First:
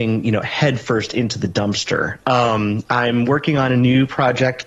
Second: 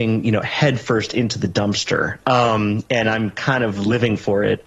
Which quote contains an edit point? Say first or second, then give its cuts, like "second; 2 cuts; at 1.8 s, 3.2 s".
first; 1 cut; at 2.9 s